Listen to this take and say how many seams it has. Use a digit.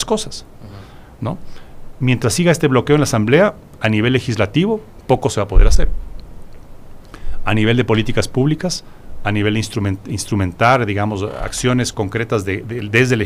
0